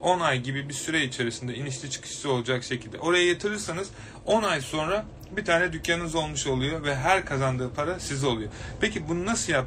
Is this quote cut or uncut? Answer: uncut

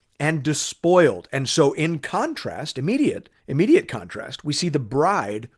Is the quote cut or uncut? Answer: cut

